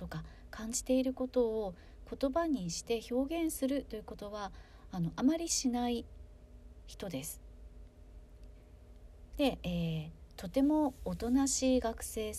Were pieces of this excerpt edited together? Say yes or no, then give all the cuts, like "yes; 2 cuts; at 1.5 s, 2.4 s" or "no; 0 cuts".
yes; 1 cut; at 9.3 s